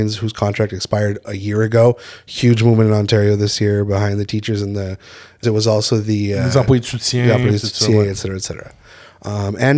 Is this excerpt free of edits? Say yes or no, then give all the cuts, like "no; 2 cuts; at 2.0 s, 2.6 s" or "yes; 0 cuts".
no; 1 cut; at 5.4 s